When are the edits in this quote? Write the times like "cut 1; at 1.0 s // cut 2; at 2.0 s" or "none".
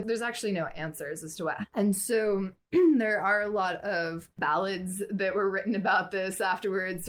cut 1; at 1.6 s